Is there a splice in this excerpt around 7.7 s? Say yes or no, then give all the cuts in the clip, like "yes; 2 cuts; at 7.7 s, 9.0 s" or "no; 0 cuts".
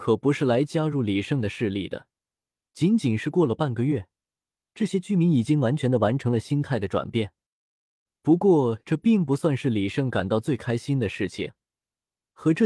no; 1 cut; at 2.6 s